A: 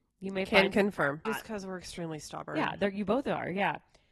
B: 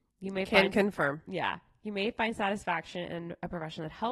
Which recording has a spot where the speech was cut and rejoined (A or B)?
A